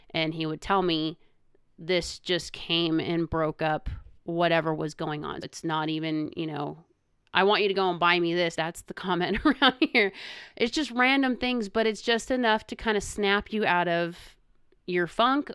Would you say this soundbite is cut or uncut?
cut